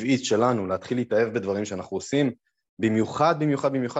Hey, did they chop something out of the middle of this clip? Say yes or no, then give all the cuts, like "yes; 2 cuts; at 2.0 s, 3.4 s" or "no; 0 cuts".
no; 0 cuts